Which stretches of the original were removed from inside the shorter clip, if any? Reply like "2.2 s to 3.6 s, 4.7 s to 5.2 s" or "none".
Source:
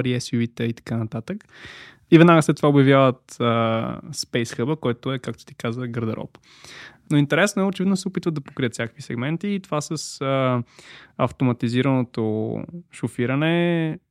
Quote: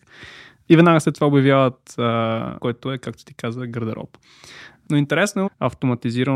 4.0 s to 4.8 s, 7.7 s to 11.0 s